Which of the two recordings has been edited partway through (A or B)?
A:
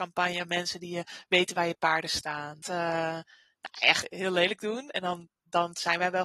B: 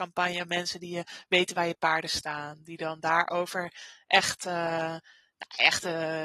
A